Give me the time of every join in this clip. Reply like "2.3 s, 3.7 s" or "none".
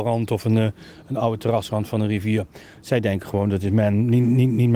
none